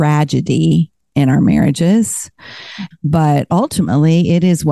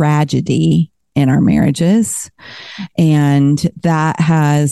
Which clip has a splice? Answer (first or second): first